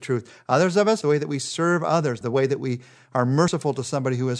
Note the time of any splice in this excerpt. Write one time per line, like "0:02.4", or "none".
0:01.0
0:02.2